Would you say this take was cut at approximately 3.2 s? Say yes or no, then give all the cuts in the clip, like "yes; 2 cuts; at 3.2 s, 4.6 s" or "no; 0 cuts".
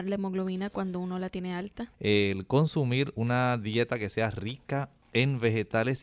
no; 1 cut; at 1.9 s